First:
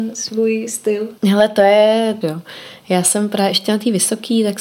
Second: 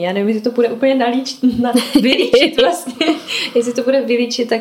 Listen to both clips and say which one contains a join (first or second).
first